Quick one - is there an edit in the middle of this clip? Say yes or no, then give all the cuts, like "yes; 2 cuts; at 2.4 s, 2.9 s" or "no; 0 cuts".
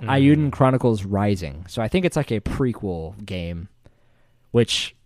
no; 0 cuts